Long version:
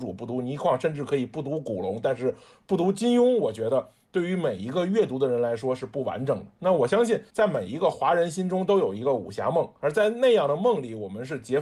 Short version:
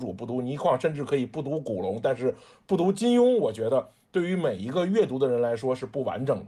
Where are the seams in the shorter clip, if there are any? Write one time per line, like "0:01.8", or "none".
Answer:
none